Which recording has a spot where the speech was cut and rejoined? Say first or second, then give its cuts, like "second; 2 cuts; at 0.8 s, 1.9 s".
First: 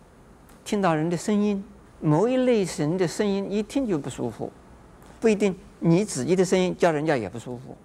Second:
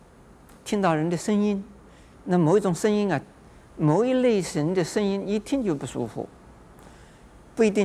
first; 2 cuts; at 1.8 s, 5.2 s